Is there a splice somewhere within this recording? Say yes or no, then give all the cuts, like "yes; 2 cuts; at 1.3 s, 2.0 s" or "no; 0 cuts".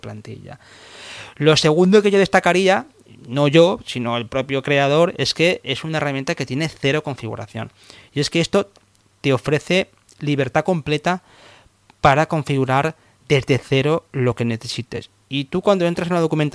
no; 0 cuts